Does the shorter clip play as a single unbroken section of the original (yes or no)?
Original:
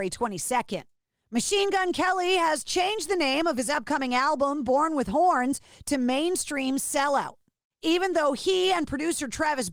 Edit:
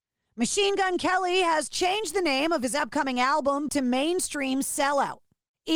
no